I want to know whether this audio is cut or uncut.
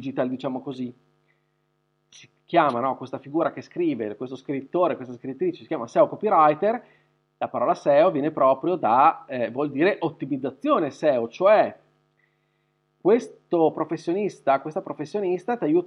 uncut